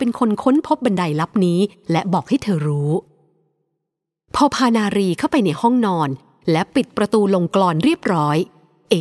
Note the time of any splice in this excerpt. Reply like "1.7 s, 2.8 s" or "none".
none